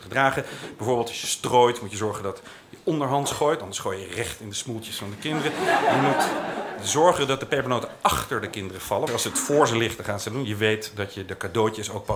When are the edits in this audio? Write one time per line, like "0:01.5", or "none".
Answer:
0:09.1